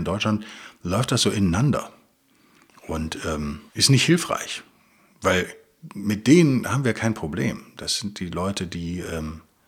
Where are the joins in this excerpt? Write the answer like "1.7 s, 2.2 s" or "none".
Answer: 3.7 s